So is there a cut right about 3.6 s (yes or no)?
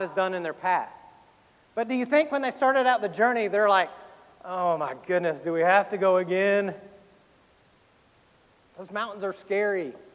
no